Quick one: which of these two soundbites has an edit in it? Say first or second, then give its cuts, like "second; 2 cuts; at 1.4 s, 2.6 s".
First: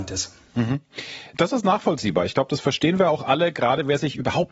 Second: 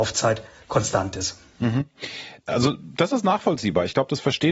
first; 1 cut; at 1.3 s